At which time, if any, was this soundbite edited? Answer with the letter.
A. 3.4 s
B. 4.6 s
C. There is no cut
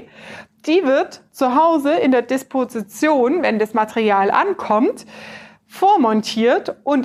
C